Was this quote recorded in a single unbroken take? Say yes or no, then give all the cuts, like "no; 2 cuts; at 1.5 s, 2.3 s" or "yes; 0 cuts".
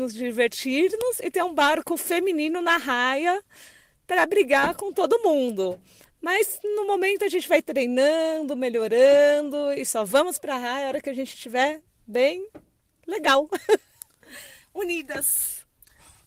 yes; 0 cuts